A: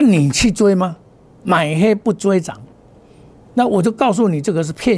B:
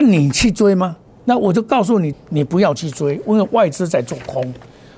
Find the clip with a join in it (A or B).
B